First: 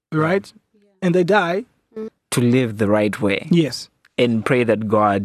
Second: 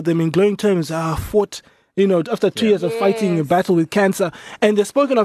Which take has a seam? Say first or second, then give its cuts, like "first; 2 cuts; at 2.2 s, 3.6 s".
first; 1 cut; at 2.1 s